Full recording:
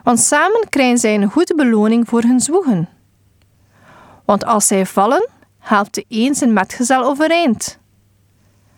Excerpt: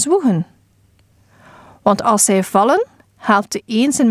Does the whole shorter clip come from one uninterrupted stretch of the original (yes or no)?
yes